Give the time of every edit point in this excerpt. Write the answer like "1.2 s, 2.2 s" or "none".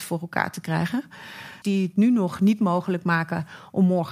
1.6 s